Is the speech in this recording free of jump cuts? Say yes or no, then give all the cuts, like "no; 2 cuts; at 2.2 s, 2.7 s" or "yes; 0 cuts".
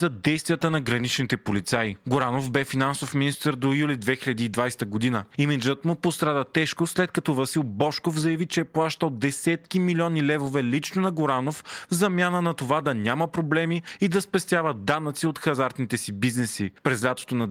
yes; 0 cuts